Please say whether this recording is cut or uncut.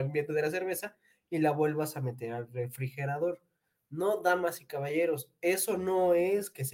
uncut